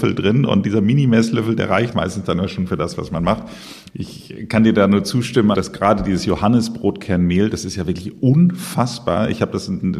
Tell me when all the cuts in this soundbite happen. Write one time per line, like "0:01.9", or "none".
0:01.9
0:03.9
0:05.5